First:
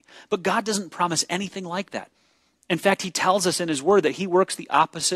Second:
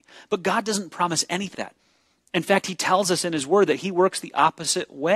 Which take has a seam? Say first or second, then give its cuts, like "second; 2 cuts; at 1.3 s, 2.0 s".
second; 1 cut; at 1.5 s